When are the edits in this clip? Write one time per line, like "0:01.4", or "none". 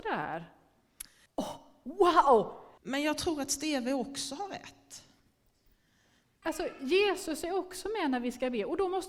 0:01.3
0:02.8
0:06.4